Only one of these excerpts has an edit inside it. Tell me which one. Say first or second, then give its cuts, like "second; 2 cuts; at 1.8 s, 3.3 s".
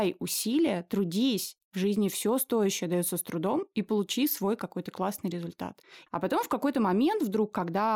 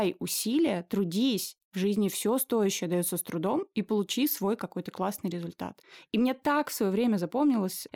first; 1 cut; at 6.1 s